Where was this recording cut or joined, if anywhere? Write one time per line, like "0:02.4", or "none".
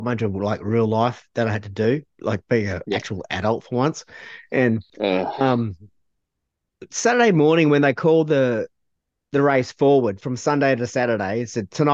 none